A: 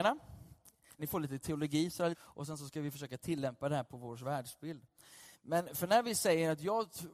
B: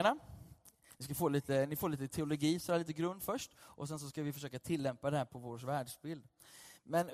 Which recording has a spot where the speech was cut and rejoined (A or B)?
A